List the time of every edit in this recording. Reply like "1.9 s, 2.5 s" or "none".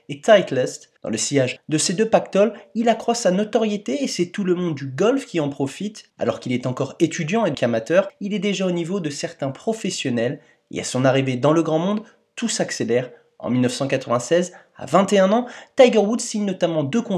1.0 s, 6.1 s, 7.5 s